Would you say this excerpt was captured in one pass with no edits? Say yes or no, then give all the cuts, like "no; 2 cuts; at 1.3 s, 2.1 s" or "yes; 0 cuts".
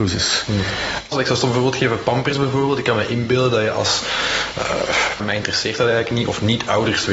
no; 2 cuts; at 1.1 s, 5.2 s